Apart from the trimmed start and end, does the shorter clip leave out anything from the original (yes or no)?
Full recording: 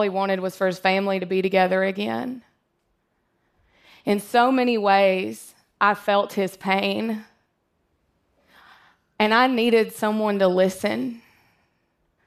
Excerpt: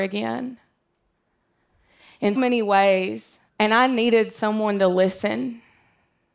yes